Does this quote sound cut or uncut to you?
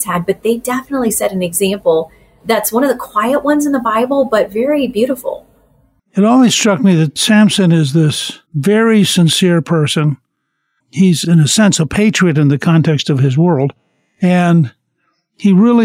cut